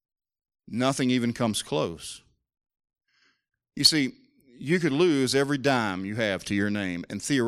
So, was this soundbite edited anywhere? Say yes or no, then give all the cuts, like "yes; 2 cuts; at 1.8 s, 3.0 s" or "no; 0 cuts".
no; 0 cuts